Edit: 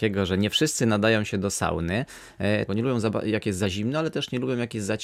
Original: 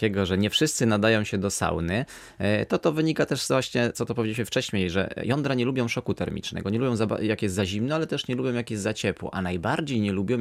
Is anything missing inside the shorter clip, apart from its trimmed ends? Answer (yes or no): yes